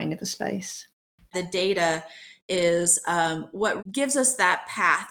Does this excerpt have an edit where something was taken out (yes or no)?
yes